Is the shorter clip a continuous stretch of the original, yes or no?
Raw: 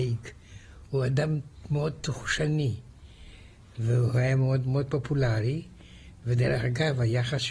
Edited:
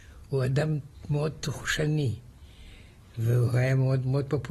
yes